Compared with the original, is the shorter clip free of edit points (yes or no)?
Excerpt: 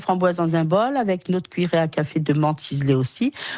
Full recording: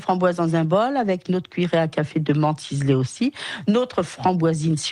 yes